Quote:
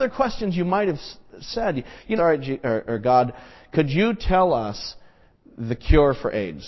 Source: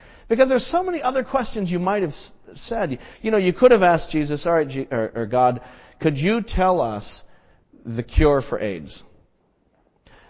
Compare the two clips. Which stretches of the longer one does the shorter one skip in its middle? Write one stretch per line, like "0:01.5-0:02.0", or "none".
0:03.3-0:04.4